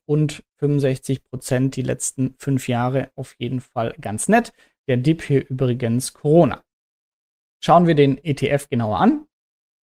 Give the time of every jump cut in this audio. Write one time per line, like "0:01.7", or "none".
none

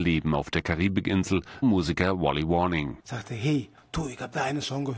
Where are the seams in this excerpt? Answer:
0:01.6
0:03.0

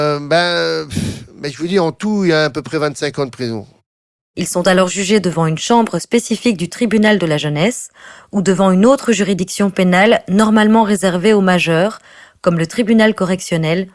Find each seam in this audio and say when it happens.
0:04.2

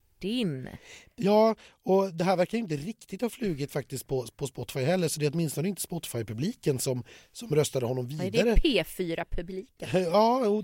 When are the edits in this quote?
none

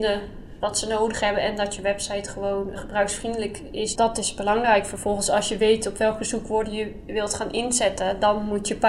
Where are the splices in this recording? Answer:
0:02.8
0:04.0

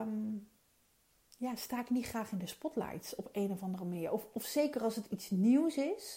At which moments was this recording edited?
none

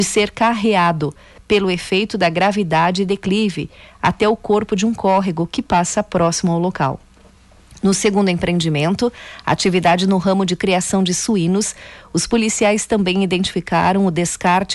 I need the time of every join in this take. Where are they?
none

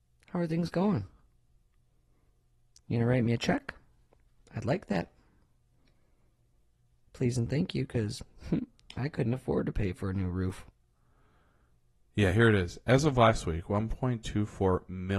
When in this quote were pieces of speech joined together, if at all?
none

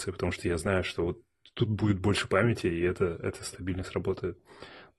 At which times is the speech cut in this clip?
none

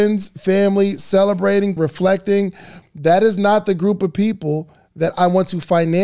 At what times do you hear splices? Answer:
0:01.8
0:02.8

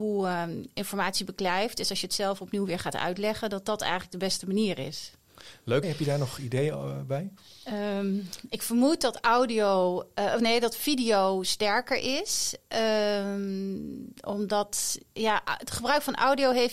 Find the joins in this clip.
0:05.8

